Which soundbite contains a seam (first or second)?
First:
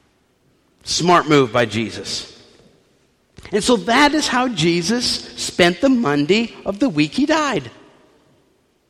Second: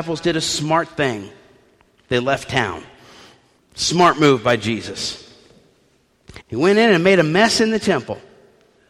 second